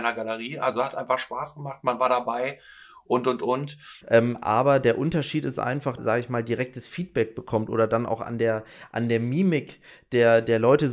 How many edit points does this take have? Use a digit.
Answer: 2